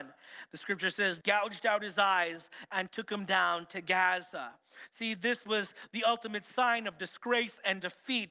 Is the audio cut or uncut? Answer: cut